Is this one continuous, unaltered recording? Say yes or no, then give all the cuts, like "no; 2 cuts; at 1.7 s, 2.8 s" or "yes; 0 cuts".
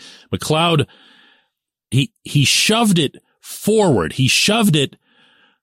no; 1 cut; at 1.9 s